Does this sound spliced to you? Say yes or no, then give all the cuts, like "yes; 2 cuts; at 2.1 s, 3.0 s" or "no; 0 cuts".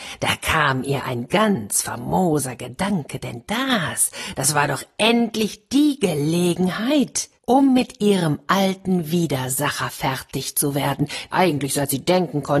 yes; 2 cuts; at 7.4 s, 11.3 s